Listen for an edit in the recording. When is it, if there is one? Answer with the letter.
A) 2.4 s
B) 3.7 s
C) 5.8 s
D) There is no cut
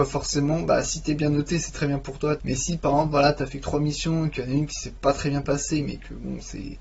A